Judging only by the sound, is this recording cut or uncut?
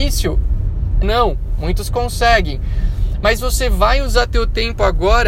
cut